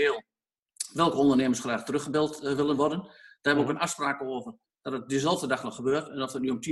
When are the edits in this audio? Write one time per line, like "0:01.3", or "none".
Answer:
none